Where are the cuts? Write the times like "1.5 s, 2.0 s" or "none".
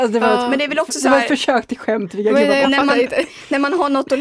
3.2 s